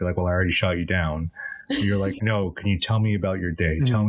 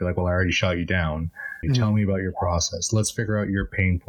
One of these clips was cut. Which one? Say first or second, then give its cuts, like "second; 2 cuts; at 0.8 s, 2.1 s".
second; 1 cut; at 1.6 s